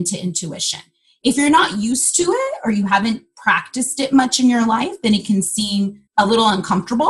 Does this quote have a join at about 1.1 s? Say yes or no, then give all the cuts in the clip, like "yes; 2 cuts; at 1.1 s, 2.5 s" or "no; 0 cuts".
no; 1 cut; at 6.1 s